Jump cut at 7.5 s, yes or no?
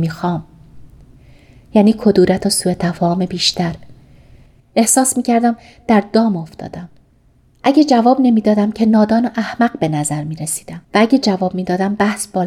no